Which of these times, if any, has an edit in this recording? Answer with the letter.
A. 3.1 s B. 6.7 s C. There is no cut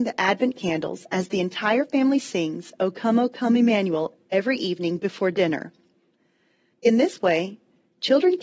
B